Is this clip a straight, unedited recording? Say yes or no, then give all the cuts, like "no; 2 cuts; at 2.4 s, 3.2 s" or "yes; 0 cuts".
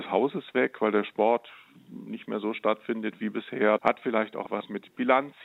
no; 1 cut; at 3.8 s